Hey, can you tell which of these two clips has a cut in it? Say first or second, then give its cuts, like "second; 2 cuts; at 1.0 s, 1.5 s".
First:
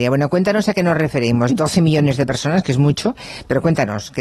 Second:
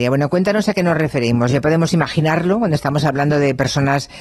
first; 1 cut; at 1.5 s